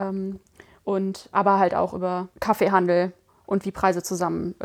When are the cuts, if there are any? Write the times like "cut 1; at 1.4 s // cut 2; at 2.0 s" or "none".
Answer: cut 1; at 2.3 s